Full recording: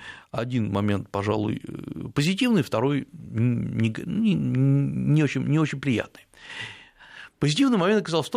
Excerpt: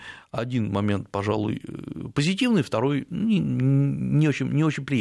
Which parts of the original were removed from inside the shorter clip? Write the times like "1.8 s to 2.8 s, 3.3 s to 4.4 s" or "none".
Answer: 3.1 s to 4.1 s